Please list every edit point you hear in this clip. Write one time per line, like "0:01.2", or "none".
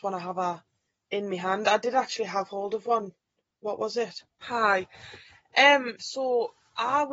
0:04.4
0:06.0